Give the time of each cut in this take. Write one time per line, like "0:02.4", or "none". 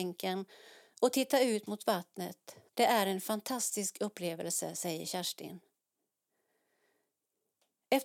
0:02.7